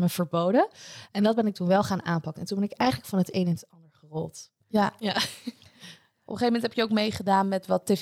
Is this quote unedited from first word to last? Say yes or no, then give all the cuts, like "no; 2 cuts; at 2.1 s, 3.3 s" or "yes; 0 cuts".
yes; 0 cuts